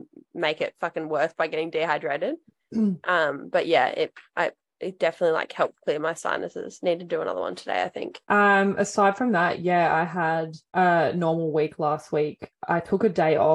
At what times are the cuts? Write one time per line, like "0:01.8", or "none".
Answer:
none